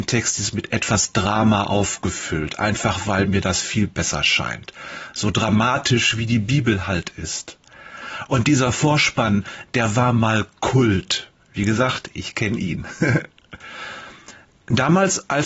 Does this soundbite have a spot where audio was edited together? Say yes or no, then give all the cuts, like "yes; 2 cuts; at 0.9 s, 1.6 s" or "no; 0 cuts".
no; 0 cuts